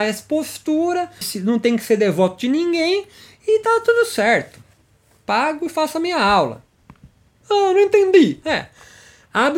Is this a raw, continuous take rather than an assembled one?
no; 2 cuts; at 1.2 s, 7.4 s

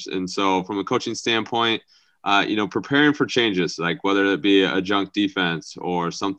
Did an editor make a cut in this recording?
no; 0 cuts

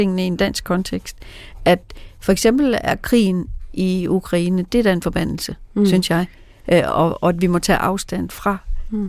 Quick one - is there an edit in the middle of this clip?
no; 0 cuts

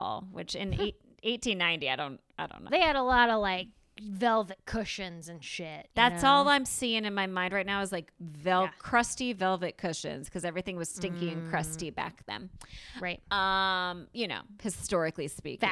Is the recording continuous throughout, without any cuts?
no; 1 cut; at 2.7 s

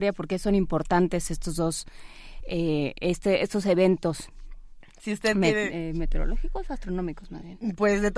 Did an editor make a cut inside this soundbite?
no; 0 cuts

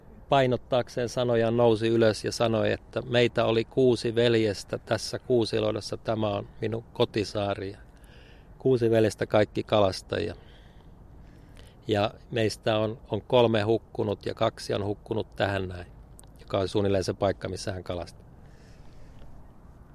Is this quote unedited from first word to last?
yes; 0 cuts

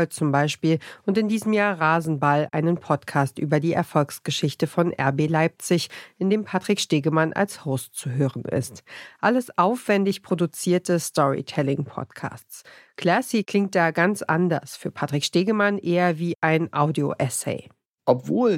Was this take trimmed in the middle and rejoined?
no; 0 cuts

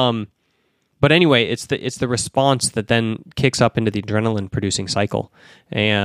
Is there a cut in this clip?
no; 0 cuts

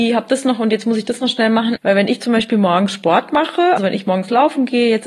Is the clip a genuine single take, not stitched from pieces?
no; 2 cuts; at 1.8 s, 3.8 s

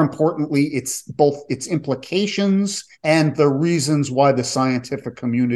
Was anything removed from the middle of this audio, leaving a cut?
yes; 1 cut; at 2.9 s

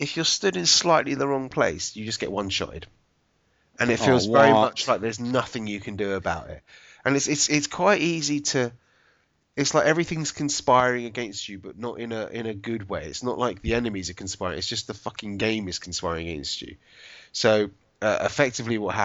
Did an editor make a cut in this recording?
no; 0 cuts

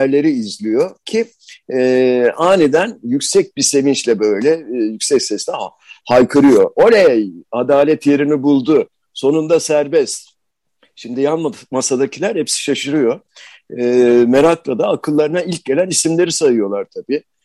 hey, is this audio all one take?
yes; 0 cuts

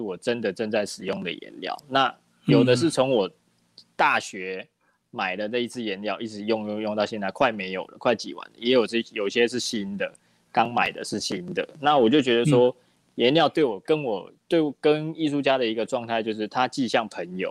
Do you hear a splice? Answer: no; 0 cuts

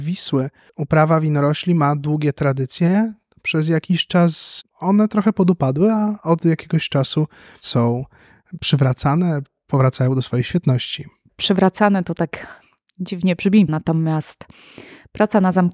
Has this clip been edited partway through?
yes; 1 cut; at 13.7 s

